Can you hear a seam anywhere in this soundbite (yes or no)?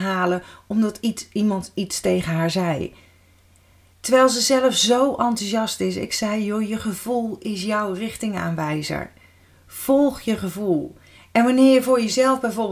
no